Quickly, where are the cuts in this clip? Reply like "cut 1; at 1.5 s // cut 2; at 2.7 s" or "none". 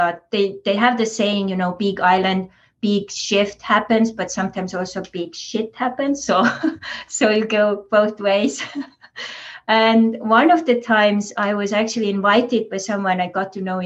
none